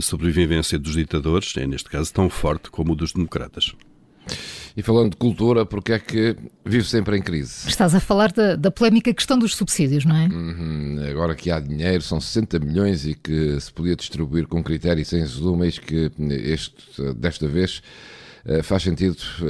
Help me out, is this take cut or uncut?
uncut